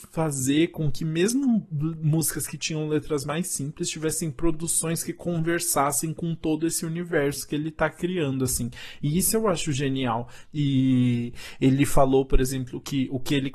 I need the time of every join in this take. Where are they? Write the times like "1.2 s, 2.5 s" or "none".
10.4 s